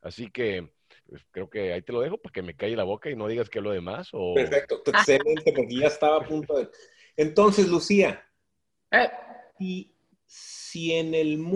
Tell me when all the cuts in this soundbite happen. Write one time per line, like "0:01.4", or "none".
0:01.0
0:04.8